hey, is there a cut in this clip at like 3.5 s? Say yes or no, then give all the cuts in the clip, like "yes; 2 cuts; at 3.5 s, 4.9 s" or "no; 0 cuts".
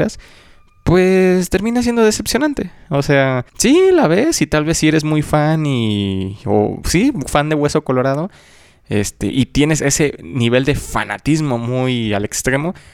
yes; 1 cut; at 3.5 s